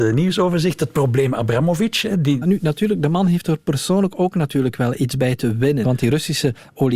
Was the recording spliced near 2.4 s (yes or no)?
yes